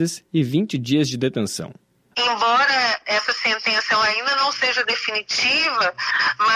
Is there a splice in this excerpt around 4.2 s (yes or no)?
no